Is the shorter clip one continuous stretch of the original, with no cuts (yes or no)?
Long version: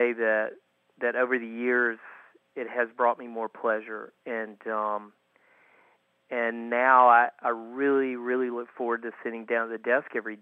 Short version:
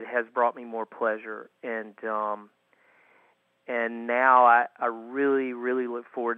yes